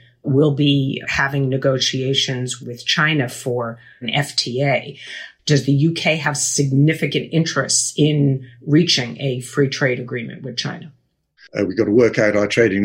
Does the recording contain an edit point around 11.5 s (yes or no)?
yes